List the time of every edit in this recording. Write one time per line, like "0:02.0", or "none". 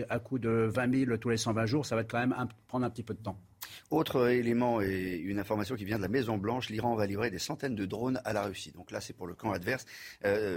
none